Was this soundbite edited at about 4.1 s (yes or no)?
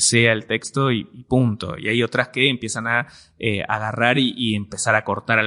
no